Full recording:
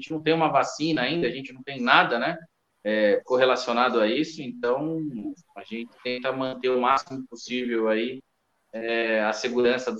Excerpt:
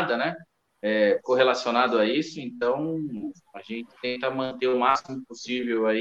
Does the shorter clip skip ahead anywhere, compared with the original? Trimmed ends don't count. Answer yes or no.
no